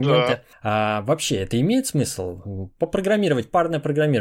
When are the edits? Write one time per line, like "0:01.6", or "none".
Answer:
none